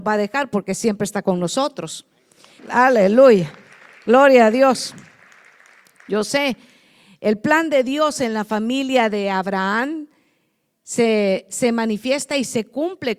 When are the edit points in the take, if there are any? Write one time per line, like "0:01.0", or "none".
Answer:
0:02.6